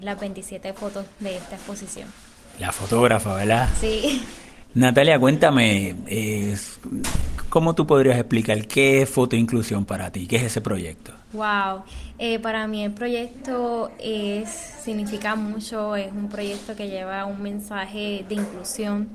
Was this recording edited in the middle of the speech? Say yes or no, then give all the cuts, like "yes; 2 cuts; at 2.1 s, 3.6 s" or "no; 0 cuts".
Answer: no; 0 cuts